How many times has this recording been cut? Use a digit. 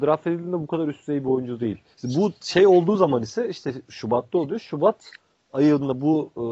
1